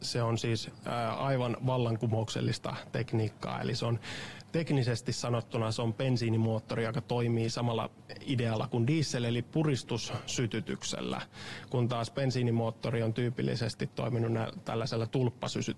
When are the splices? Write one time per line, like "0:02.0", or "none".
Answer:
none